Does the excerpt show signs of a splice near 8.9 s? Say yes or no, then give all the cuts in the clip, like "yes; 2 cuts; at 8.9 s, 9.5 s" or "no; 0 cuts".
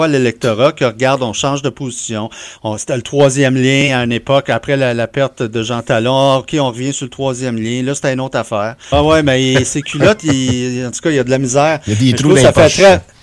yes; 1 cut; at 8.9 s